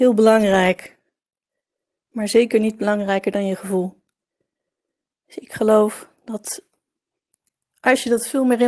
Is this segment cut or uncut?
uncut